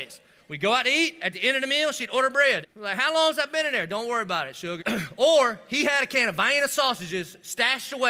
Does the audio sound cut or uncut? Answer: cut